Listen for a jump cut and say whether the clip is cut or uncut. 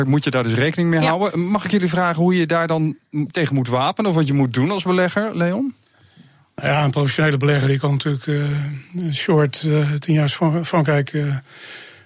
uncut